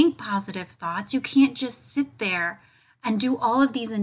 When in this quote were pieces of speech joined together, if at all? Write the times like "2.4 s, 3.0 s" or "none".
none